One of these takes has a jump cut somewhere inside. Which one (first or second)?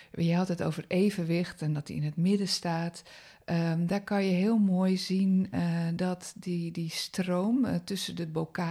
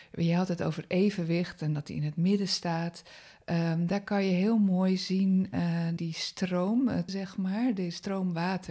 second